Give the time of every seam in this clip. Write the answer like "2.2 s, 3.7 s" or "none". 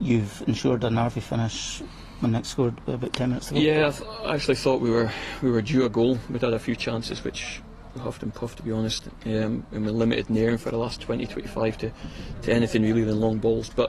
none